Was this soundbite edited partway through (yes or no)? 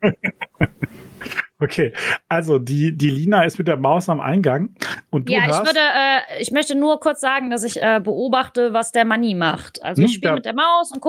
no